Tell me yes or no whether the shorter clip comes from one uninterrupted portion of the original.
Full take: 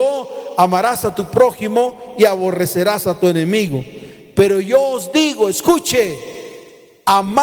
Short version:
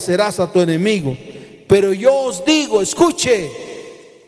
yes